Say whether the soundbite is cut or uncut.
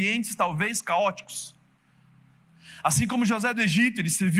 uncut